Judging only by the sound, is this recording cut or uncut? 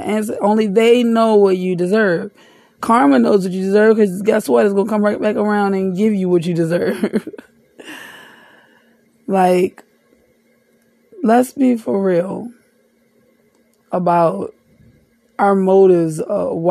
uncut